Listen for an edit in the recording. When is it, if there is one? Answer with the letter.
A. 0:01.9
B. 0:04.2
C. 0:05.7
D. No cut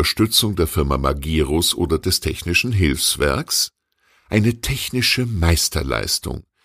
D